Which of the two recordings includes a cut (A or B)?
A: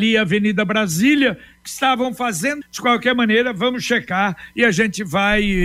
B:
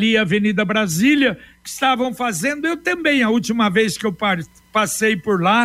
A